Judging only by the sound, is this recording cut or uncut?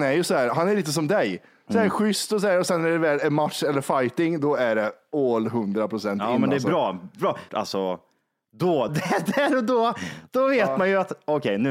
cut